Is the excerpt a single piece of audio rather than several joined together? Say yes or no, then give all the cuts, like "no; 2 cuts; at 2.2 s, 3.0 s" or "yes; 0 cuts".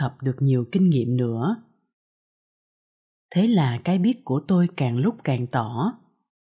yes; 0 cuts